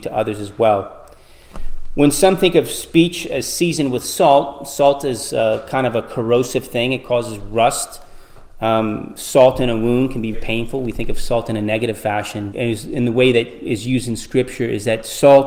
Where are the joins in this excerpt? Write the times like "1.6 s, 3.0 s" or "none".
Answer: 10.3 s, 12.5 s